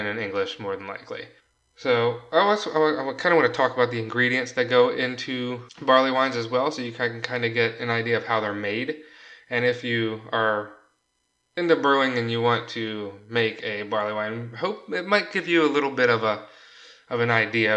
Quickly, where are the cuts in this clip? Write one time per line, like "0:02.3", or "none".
none